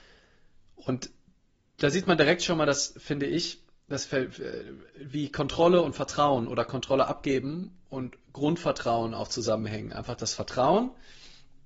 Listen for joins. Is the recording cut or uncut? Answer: uncut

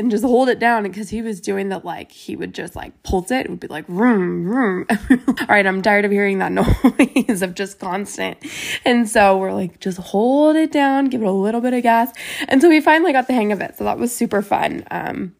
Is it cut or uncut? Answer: cut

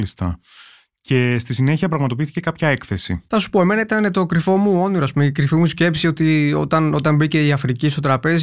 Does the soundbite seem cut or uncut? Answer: uncut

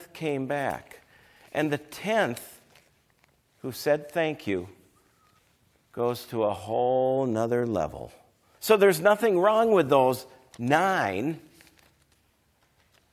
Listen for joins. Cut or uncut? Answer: cut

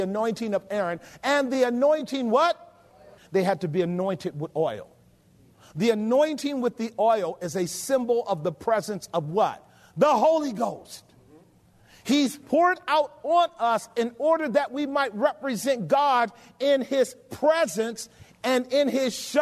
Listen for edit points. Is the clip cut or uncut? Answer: cut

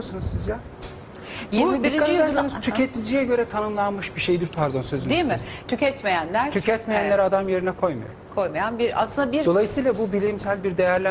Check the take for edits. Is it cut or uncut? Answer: cut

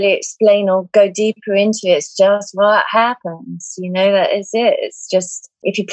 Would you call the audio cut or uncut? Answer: uncut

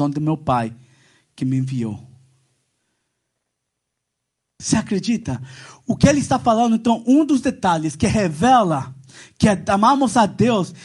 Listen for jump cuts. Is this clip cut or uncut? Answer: uncut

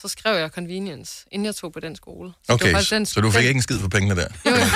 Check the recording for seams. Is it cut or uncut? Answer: uncut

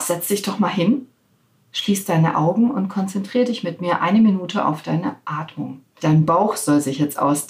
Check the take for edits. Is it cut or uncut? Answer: cut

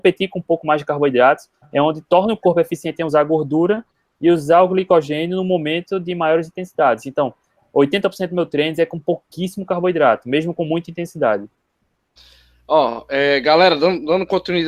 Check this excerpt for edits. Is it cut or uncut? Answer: uncut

